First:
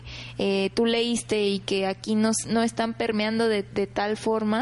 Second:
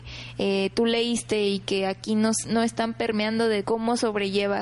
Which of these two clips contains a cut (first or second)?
second